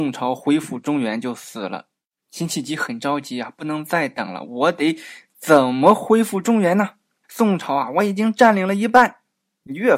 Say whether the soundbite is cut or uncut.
cut